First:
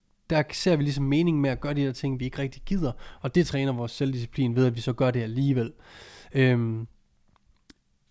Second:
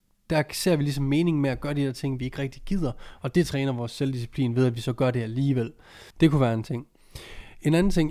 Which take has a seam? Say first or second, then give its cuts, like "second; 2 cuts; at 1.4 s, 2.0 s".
second; 1 cut; at 6.1 s